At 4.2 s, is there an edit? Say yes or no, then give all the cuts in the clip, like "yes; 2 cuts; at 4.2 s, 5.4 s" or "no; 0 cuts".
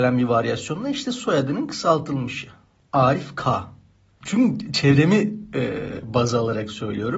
yes; 1 cut; at 4.2 s